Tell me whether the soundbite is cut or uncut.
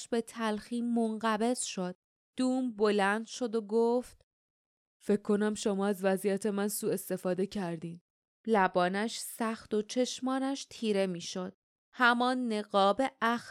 cut